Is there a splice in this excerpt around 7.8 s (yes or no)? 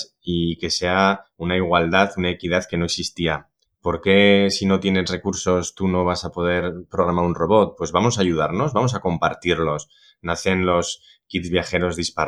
no